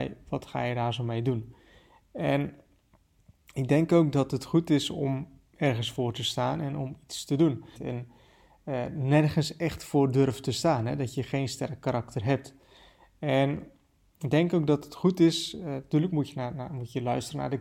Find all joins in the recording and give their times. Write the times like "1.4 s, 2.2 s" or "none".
7.7 s